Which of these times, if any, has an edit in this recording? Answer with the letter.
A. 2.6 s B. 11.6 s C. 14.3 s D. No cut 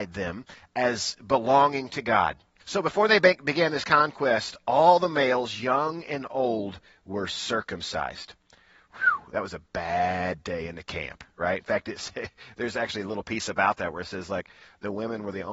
A